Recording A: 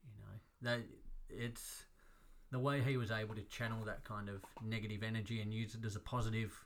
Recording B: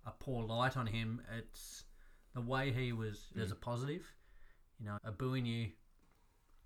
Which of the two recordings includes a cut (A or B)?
B